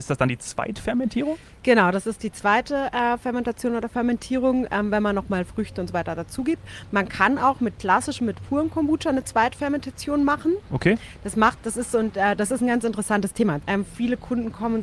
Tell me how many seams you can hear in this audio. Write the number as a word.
one